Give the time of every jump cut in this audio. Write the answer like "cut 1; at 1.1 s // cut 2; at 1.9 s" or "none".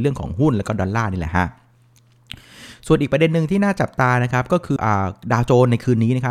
cut 1; at 4.8 s